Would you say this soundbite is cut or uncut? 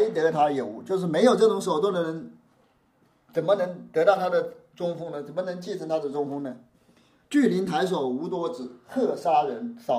uncut